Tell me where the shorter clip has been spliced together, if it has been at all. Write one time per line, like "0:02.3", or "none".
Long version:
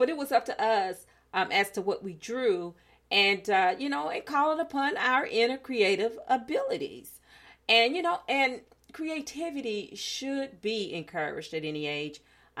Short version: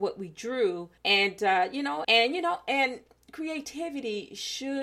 0:01.0
0:02.0